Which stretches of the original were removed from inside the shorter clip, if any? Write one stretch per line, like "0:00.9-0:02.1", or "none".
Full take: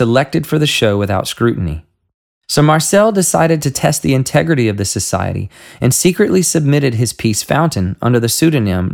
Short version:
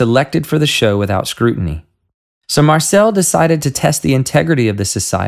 none